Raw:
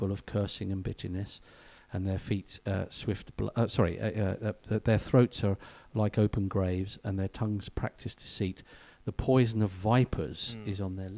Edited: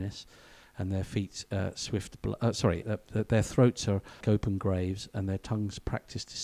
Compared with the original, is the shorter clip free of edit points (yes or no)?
no